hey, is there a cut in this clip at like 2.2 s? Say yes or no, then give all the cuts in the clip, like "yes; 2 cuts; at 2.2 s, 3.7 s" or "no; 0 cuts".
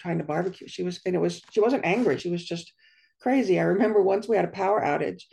no; 0 cuts